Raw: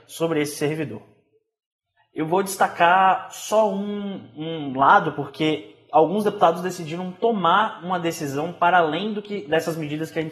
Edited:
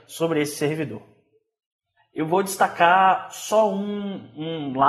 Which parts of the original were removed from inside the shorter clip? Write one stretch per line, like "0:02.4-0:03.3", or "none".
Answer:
none